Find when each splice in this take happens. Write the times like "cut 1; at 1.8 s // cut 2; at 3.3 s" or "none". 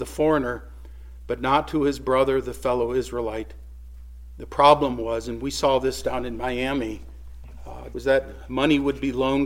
cut 1; at 7.9 s